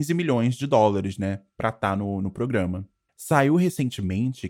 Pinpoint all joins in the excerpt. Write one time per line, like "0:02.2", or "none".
none